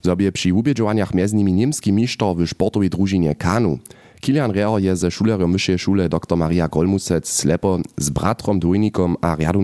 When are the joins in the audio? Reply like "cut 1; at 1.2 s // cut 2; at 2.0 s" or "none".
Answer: none